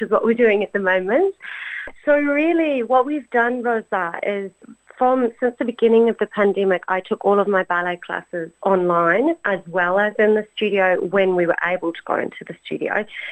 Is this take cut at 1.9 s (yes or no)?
yes